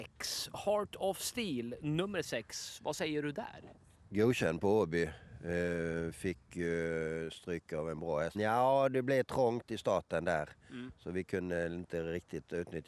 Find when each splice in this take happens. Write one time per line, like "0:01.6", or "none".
0:08.3